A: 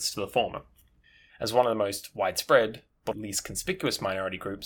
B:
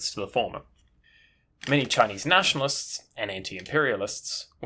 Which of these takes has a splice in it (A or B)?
A